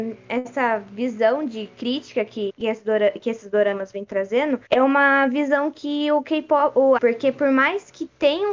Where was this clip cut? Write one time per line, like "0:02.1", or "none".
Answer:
0:02.5
0:04.7
0:07.0